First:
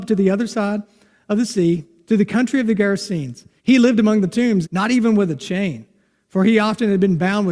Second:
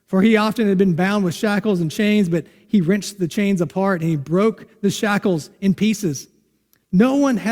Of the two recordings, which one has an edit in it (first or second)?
first